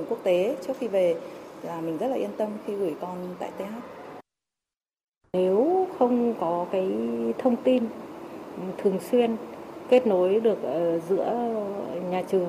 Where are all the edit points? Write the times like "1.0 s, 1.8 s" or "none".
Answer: 5.2 s